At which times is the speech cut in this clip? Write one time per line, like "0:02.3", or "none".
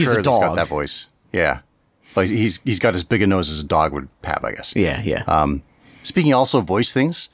none

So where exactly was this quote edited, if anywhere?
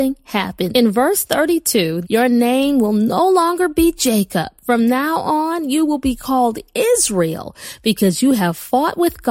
0:02.0

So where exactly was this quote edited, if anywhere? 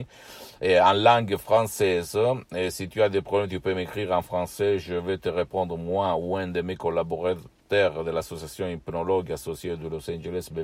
none

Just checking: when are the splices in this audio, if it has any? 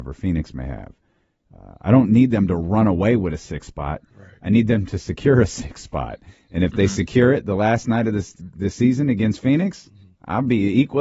none

